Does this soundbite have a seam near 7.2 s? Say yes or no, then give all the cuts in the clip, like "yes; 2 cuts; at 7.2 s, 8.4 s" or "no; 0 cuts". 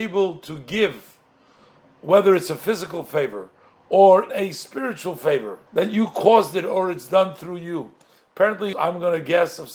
no; 3 cuts; at 4.3 s, 5.7 s, 8.7 s